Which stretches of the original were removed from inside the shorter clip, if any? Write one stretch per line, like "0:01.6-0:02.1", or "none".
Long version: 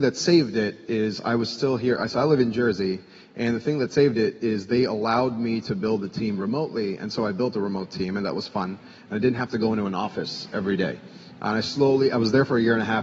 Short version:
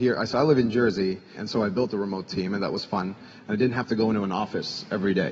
0:03.2-0:07.0